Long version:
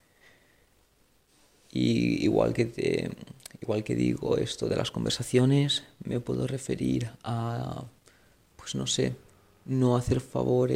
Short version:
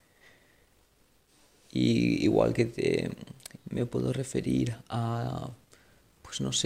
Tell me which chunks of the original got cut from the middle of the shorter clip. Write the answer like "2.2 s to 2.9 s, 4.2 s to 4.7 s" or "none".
3.6 s to 5.9 s